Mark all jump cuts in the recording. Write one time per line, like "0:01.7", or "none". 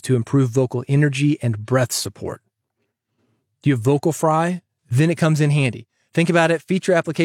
0:04.8